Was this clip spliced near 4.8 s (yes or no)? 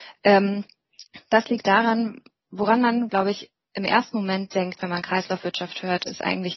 no